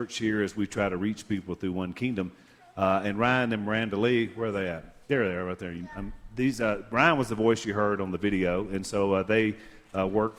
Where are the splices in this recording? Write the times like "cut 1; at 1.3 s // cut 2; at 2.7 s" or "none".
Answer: cut 1; at 5.0 s